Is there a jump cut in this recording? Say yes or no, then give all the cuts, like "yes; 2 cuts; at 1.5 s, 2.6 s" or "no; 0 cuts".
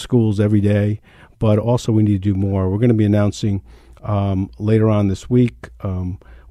no; 0 cuts